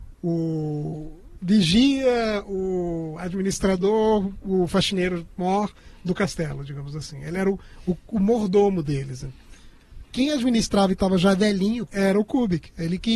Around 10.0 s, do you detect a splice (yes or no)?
yes